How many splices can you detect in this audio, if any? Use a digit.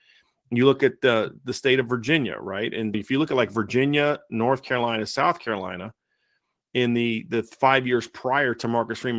1